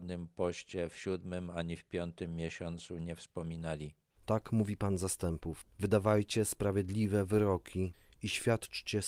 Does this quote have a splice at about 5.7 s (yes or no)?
no